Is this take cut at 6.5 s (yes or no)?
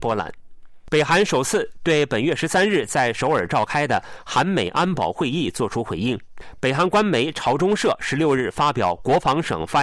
no